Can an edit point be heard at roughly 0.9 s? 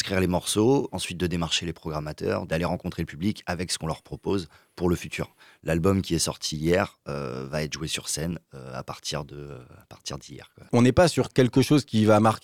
yes; 1 cut; at 0.9 s

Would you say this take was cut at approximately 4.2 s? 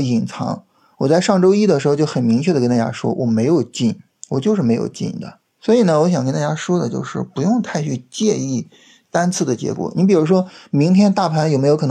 no; 1 cut; at 5.5 s

